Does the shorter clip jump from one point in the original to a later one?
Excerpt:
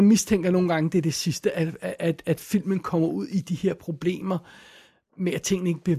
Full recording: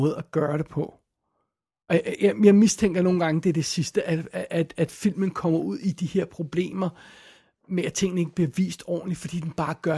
no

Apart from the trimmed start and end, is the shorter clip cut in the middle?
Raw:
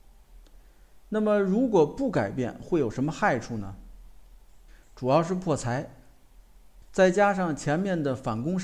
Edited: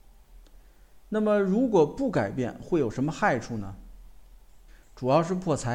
no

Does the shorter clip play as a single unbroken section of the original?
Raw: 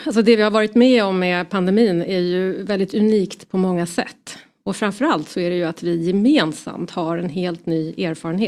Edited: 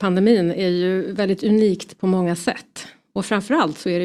yes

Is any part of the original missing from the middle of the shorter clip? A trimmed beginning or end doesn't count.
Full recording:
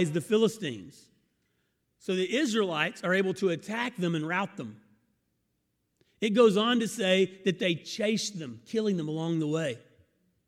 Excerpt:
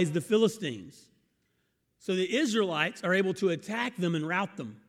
no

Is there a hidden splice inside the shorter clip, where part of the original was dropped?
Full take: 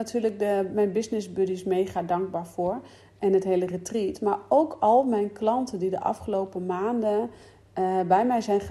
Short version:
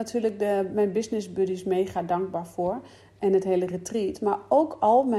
no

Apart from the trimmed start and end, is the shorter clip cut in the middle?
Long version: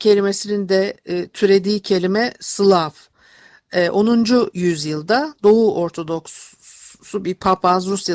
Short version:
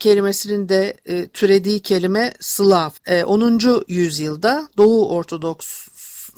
yes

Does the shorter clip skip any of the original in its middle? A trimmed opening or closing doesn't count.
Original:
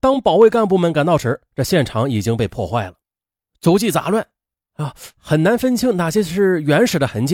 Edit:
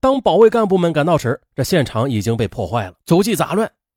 yes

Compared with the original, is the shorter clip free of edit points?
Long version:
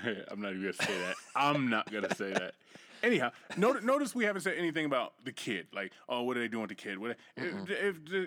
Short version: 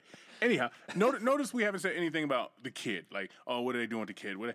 yes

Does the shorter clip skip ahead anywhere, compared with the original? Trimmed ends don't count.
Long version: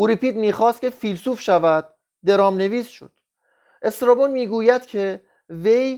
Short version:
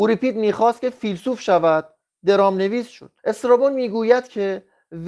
yes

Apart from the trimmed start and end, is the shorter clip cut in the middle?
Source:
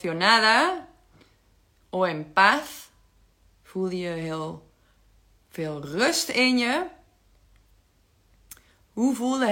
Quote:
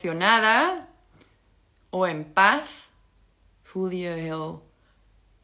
no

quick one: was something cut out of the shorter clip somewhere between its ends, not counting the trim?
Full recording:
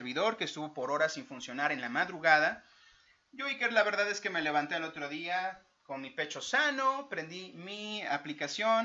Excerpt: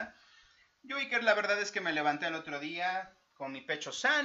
no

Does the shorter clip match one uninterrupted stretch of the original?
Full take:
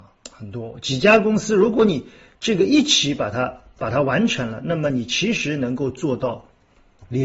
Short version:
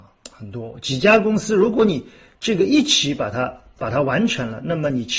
yes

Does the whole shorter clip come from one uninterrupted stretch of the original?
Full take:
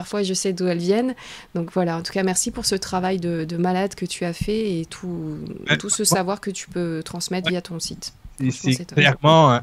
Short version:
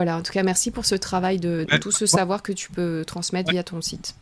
no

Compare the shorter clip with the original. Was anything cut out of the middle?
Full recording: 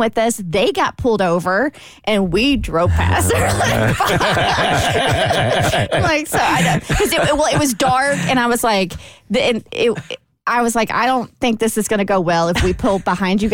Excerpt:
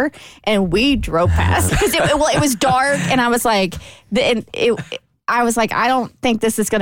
yes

